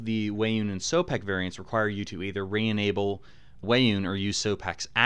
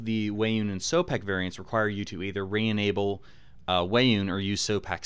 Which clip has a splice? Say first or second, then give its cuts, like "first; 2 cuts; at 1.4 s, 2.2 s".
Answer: first; 1 cut; at 3.6 s